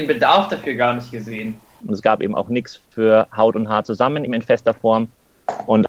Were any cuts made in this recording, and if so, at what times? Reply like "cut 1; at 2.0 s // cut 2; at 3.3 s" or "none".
cut 1; at 1.8 s // cut 2; at 4.3 s